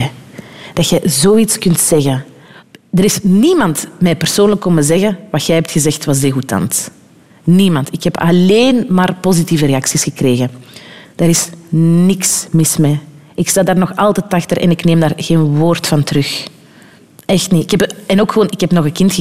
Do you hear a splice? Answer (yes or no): yes